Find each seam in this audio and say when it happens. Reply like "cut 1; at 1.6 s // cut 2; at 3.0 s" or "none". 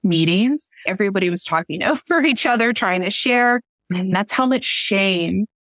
cut 1; at 3.8 s